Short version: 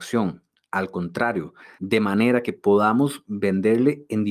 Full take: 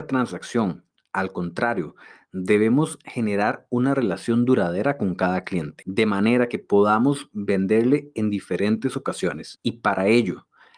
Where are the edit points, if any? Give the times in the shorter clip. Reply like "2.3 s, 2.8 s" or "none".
1.8 s